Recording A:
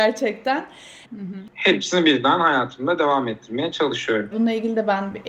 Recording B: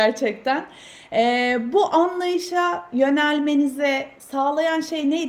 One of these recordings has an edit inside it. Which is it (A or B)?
A